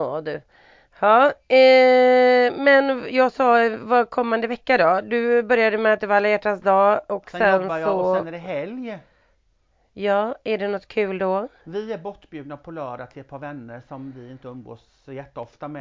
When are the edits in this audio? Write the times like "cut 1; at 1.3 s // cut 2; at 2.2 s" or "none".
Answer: none